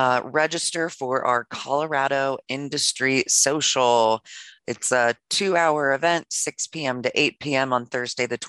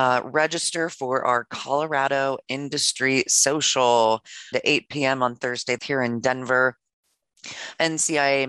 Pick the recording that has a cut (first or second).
second